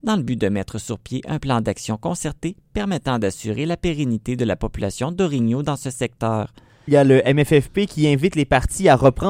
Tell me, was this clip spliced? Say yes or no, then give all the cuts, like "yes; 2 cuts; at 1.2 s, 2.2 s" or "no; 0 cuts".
yes; 1 cut; at 6.9 s